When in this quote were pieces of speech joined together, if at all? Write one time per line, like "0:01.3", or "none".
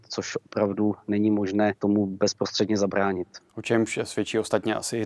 0:01.8
0:03.5